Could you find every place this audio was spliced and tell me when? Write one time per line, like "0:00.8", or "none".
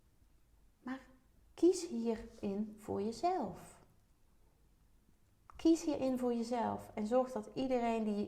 none